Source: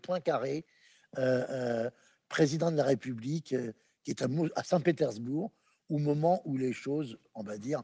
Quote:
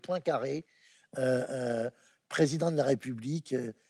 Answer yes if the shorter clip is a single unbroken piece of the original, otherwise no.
yes